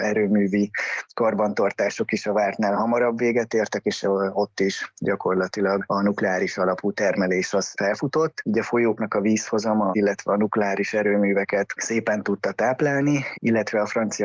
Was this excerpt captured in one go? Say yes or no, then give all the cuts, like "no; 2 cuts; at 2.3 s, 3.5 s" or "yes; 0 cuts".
no; 3 cuts; at 8.4 s, 9.9 s, 13.3 s